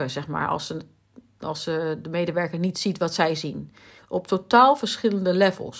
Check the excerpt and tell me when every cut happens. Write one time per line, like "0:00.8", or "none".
0:04.0